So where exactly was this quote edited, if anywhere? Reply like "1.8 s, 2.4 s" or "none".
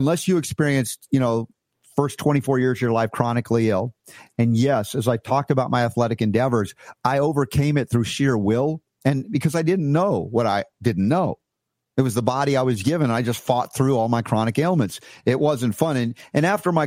none